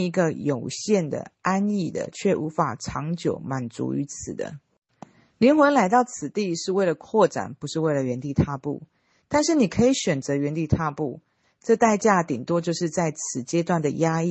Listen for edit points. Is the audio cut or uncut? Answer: uncut